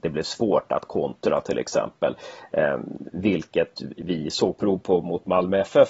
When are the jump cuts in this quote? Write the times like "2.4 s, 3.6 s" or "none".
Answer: none